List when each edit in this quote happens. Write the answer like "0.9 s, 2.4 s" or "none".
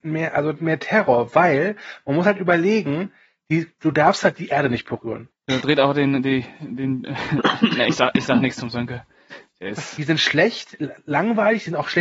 5.3 s, 10.0 s

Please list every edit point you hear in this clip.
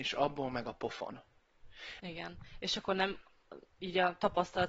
2.0 s

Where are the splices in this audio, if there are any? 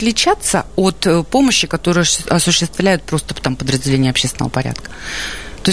none

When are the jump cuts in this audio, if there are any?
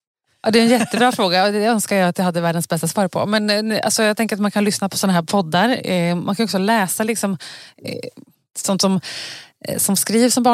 none

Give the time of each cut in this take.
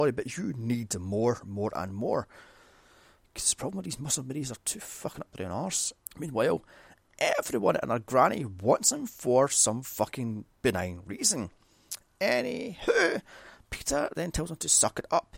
6.0 s

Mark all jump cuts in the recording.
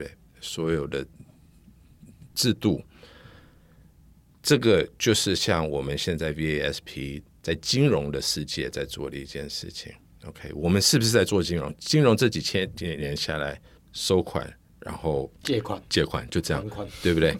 13.8 s, 15.4 s

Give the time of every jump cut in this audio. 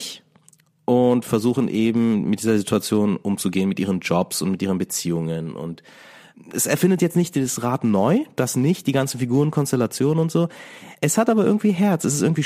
none

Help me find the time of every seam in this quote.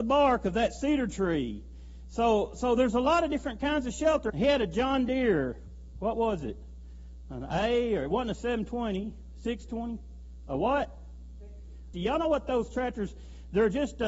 2.0 s, 4.3 s, 11.9 s

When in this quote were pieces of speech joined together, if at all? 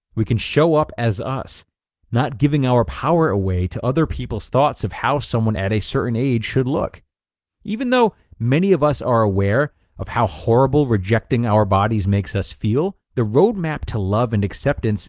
7.5 s, 13.0 s

